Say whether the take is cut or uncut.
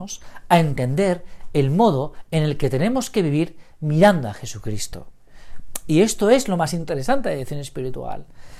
uncut